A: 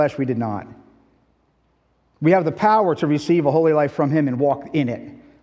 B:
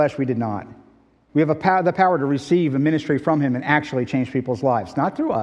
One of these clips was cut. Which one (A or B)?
B